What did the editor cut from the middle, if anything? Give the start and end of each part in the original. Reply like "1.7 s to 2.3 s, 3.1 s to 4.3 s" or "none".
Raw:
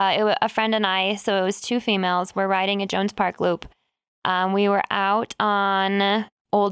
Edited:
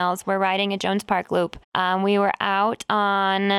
3.7 s to 4.1 s